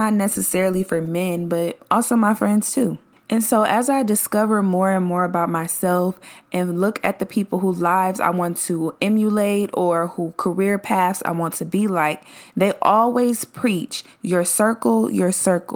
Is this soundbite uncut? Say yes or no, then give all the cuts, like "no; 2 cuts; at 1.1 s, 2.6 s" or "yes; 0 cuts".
yes; 0 cuts